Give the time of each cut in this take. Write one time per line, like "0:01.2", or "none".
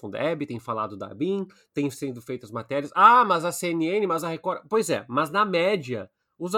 none